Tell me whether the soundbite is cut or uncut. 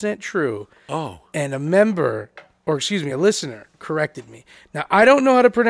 uncut